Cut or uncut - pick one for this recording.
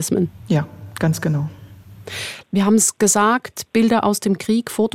cut